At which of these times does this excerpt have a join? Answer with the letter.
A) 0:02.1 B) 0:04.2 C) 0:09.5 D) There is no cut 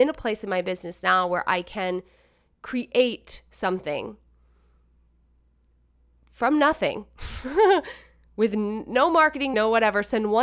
C